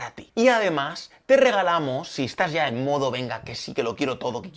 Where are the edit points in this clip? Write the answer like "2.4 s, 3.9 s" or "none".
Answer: none